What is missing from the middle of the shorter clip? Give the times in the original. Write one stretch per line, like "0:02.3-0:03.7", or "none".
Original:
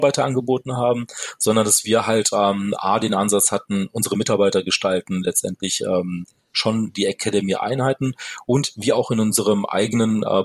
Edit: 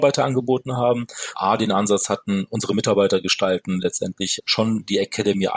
0:01.3-0:02.8
0:05.8-0:06.4